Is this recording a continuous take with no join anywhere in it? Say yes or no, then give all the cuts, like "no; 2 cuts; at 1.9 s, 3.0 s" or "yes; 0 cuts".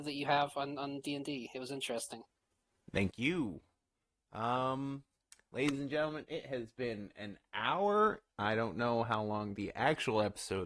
no; 1 cut; at 8.3 s